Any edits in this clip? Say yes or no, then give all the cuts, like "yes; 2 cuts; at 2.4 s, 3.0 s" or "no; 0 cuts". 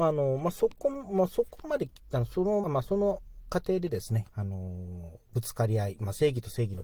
yes; 2 cuts; at 2.6 s, 4.2 s